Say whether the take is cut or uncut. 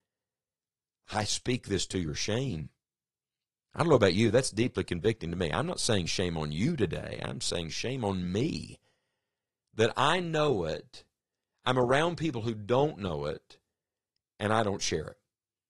uncut